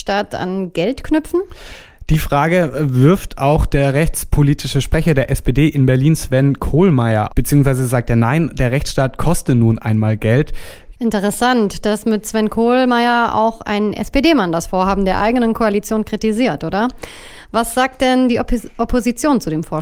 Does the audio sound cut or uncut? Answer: cut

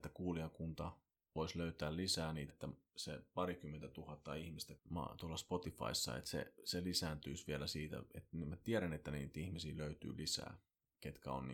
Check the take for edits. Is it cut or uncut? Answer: cut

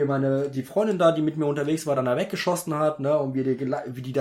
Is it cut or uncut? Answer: uncut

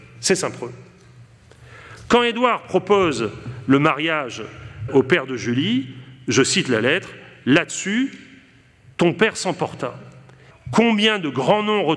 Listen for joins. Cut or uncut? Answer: cut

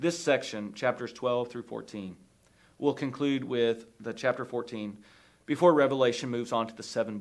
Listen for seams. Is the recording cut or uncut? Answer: uncut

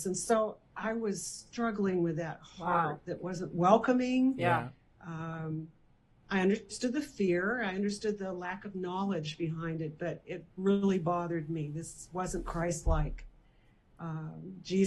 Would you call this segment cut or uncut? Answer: uncut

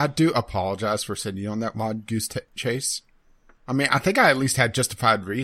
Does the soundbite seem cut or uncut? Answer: uncut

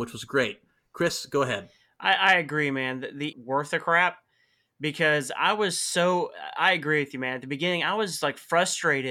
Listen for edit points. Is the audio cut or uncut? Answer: cut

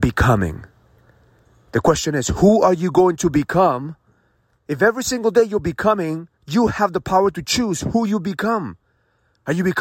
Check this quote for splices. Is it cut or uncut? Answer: cut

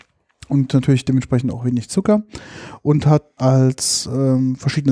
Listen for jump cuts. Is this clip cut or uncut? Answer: cut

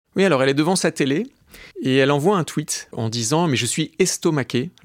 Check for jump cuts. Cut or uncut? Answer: cut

